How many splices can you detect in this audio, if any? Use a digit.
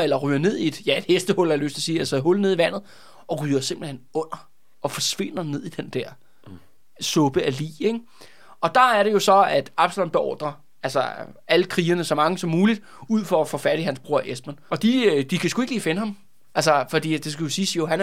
0